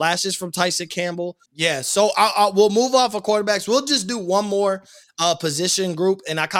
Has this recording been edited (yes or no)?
yes